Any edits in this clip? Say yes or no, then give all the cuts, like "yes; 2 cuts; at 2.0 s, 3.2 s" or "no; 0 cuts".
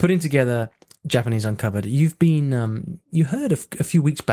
no; 0 cuts